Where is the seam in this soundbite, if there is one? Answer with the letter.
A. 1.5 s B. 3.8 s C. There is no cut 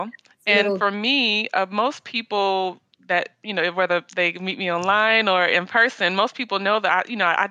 C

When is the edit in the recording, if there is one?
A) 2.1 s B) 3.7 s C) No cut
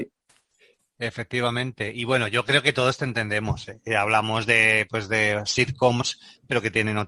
C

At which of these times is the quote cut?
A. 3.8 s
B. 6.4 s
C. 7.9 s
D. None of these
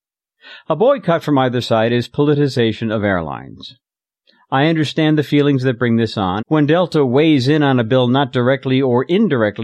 B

